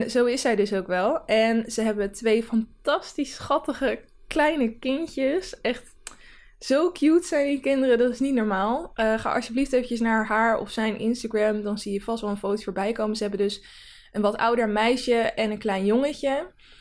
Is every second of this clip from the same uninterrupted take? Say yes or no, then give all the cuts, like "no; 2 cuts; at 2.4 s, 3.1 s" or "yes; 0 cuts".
yes; 0 cuts